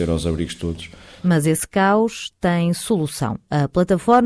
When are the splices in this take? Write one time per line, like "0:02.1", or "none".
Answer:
0:01.2